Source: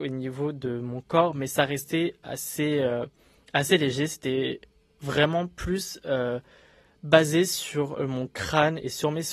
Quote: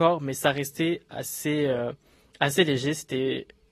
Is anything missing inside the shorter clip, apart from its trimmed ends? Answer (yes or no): no